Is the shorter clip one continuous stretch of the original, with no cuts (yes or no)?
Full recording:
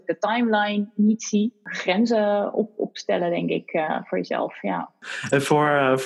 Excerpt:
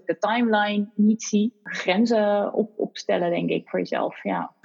no